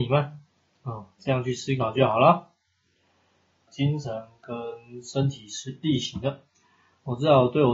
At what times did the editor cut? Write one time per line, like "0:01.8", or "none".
0:03.7